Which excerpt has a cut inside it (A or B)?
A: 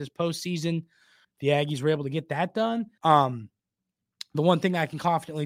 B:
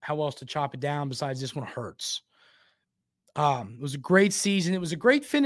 A